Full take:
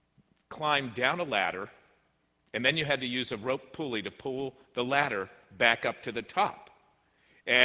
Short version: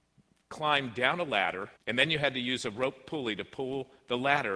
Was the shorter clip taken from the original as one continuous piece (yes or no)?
no